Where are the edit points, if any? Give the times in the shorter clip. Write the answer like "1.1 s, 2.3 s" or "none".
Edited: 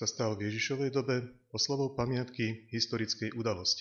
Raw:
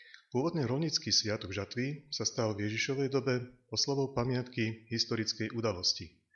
none

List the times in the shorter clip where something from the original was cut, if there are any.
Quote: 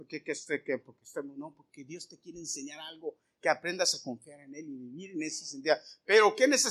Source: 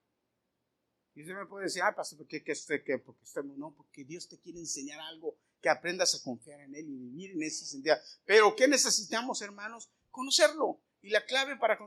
none

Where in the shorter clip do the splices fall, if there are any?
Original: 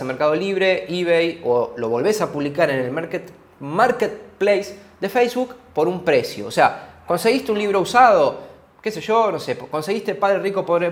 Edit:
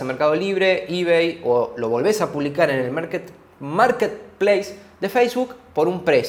none

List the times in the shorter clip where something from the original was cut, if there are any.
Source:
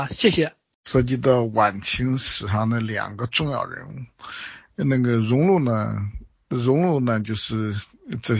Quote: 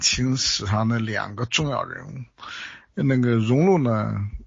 none

